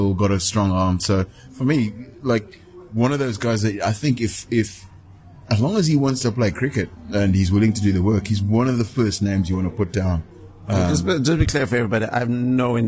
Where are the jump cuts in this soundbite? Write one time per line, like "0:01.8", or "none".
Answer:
none